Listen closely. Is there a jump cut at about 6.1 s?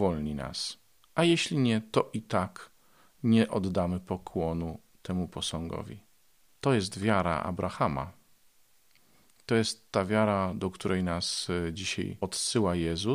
no; 0 cuts

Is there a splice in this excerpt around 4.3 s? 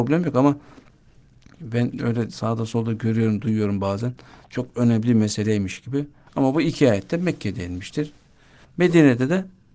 no; 2 cuts; at 6.3 s, 8.6 s

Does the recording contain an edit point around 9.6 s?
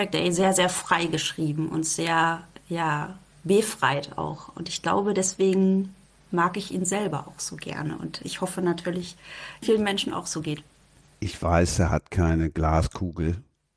yes; 1 cut; at 9.6 s

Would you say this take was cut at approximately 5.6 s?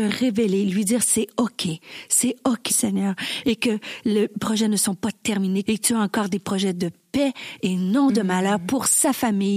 yes; 2 cuts; at 2.7 s, 5.6 s

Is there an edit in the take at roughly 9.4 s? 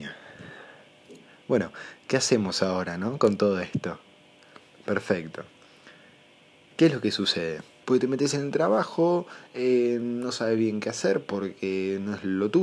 no; 1 cut; at 7.8 s

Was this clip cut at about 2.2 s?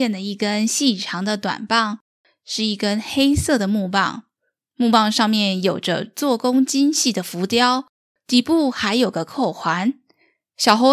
no; 0 cuts

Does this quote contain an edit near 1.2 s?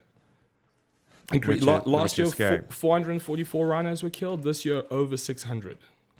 yes; 1 cut; at 1.2 s

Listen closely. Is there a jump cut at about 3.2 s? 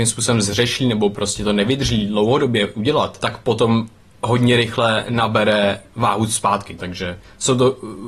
yes; 2 cuts; at 3.2 s, 6.8 s

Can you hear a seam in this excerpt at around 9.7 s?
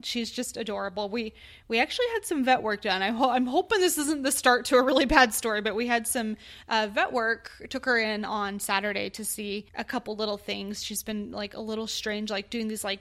yes; 1 cut; at 9.7 s

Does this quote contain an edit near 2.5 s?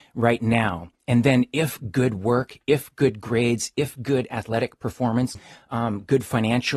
no; 2 cuts; at 1.0 s, 5.3 s

